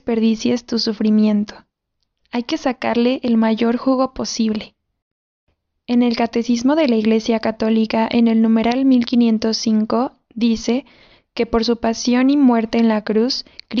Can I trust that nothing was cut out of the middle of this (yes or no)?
yes